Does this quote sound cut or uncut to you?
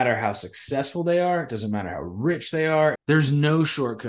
cut